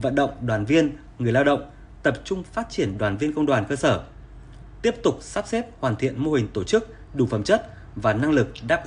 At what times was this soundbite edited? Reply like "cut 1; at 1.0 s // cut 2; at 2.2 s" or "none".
cut 1; at 7.1 s